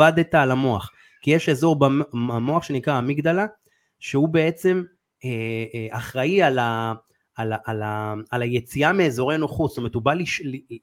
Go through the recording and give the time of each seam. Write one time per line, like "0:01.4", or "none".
none

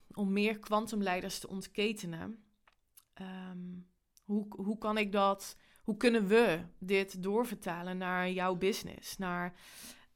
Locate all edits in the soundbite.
none

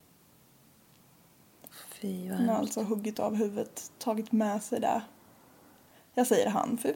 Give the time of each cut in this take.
none

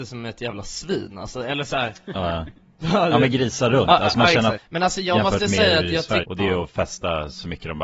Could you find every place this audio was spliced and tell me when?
0:04.6
0:06.2

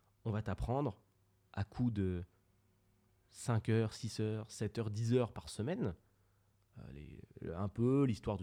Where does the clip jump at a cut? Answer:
none

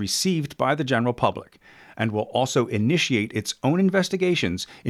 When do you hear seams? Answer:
none

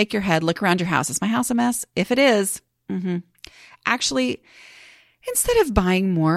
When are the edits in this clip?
none

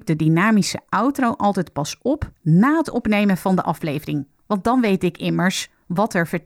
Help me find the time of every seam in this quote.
none

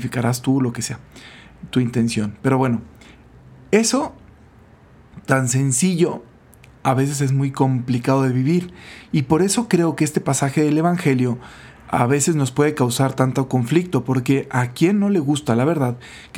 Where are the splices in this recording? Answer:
none

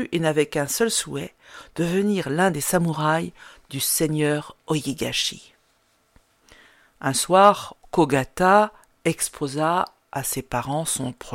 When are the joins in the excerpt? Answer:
0:07.8

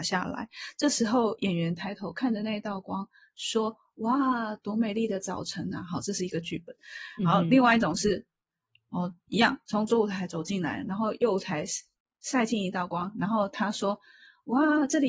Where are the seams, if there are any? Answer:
none

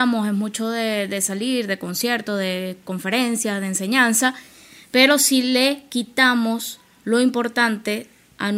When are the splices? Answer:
none

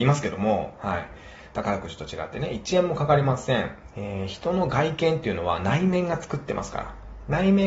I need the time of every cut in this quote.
0:01.5
0:03.9

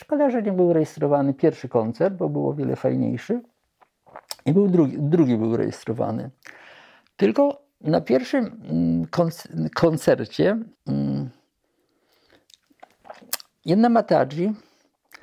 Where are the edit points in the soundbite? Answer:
0:10.8

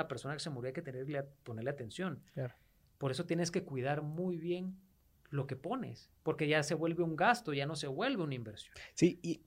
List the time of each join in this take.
none

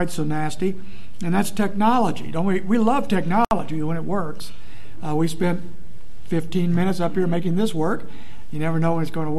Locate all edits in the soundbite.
none

